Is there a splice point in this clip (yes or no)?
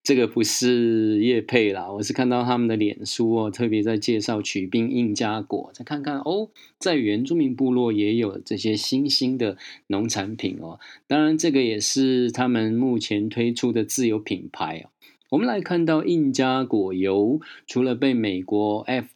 no